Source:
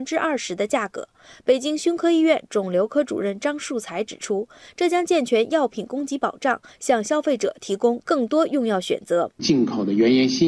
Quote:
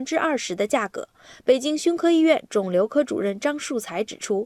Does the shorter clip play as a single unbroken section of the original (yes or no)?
yes